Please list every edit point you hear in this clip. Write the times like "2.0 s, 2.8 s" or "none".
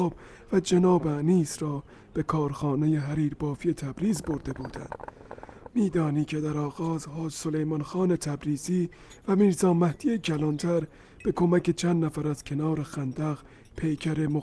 5.7 s